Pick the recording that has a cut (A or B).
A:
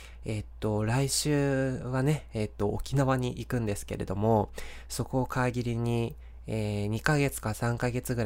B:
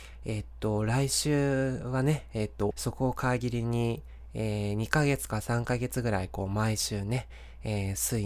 B